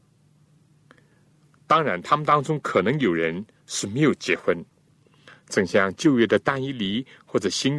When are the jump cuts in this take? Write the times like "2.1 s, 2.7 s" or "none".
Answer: none